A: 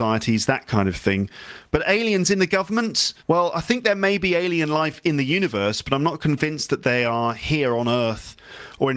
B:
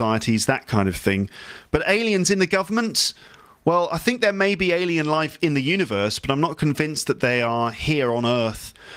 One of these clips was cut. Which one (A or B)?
A